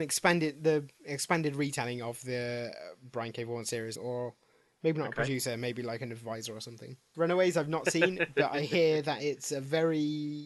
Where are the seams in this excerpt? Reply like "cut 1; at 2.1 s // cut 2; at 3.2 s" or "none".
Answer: cut 1; at 4.0 s // cut 2; at 7.1 s